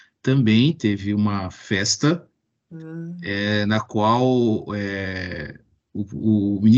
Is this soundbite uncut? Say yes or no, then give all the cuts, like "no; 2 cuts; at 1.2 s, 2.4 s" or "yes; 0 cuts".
yes; 0 cuts